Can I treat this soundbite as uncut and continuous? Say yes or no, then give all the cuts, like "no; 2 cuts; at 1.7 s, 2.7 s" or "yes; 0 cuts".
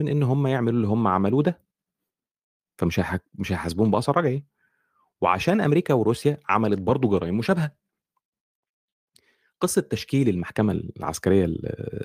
yes; 0 cuts